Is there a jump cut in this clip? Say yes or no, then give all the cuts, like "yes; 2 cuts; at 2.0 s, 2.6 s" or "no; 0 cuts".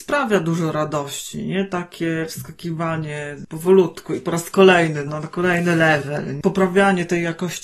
yes; 1 cut; at 5.1 s